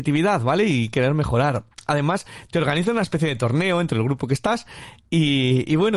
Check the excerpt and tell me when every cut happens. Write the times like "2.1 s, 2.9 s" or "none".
none